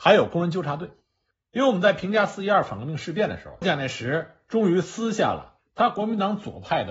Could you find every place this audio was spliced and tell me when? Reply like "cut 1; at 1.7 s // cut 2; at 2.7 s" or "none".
cut 1; at 1.3 s // cut 2; at 3.6 s